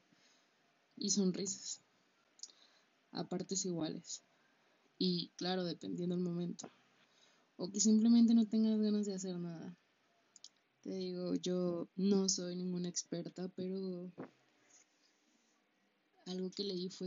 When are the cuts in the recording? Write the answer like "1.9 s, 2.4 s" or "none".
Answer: 10.6 s, 11.9 s